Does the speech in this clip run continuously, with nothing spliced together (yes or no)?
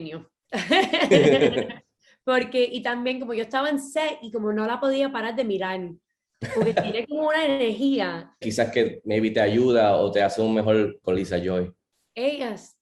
no